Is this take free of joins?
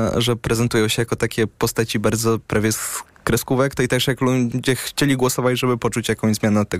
yes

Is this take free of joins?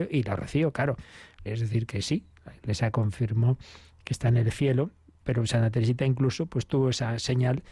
no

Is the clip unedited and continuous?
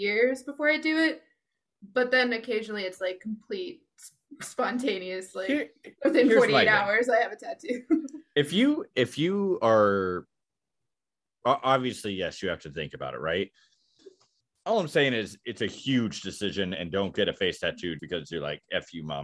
no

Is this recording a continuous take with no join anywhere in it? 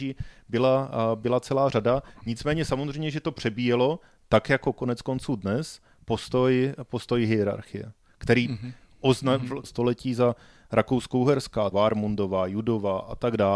no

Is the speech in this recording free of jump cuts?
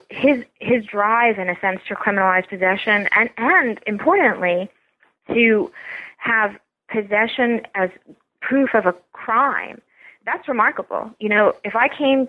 yes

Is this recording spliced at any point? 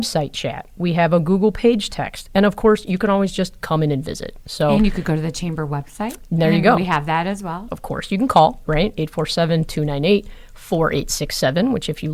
yes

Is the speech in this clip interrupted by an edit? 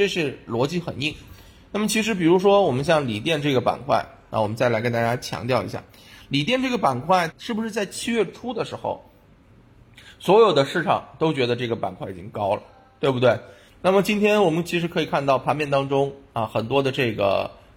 yes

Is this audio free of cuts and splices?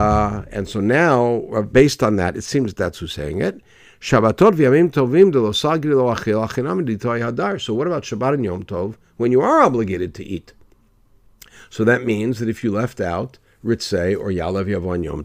no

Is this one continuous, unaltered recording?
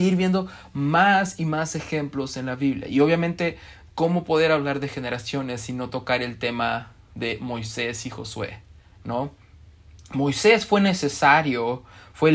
yes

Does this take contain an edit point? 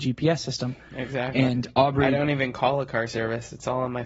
no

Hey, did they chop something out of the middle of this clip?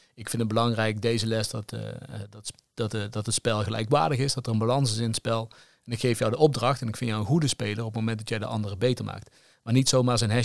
no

